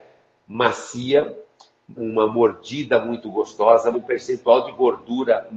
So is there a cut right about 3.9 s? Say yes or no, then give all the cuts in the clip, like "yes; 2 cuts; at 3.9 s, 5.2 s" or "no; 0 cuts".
yes; 2 cuts; at 2.0 s, 3.9 s